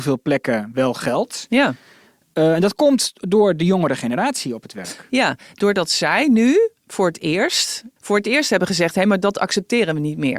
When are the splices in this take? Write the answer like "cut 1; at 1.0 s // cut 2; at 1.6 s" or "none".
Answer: cut 1; at 8.0 s